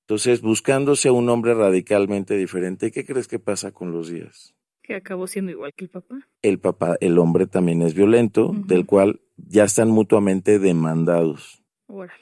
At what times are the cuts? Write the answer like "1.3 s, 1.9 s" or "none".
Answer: none

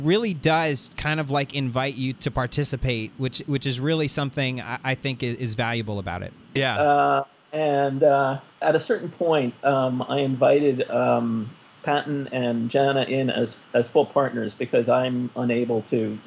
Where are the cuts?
6.6 s, 8.5 s

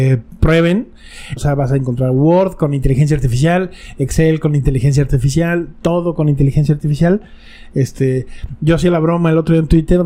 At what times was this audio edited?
1.4 s

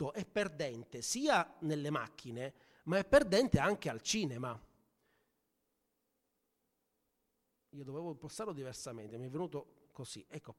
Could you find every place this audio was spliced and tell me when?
none

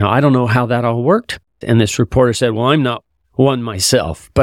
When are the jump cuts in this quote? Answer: 1.6 s

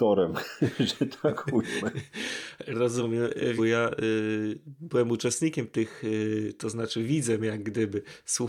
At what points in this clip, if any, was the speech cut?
3.6 s

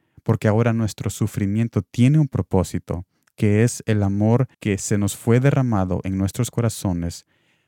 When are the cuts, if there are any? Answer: 4.5 s

